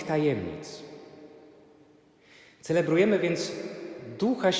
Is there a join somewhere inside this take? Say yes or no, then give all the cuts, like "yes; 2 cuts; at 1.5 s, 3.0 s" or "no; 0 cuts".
no; 0 cuts